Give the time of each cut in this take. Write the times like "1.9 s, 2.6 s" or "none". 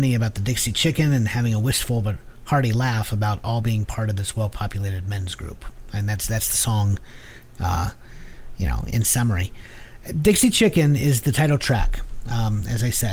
none